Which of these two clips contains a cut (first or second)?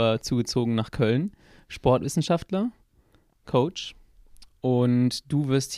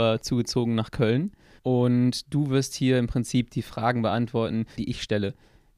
second